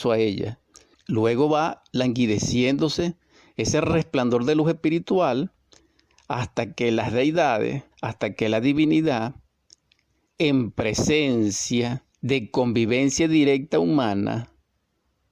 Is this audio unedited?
no; 3 cuts; at 0.9 s, 7.9 s, 12.1 s

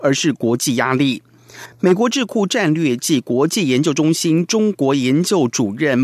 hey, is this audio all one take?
yes; 0 cuts

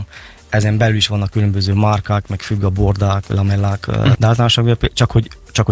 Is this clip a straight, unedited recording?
no; 1 cut; at 4.1 s

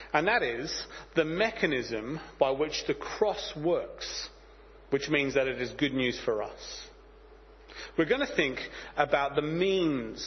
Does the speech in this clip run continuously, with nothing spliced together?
yes; 0 cuts

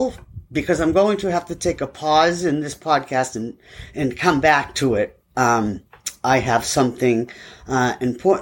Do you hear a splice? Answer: no; 0 cuts

